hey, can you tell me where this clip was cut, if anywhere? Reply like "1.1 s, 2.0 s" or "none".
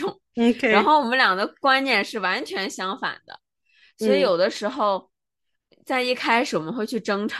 none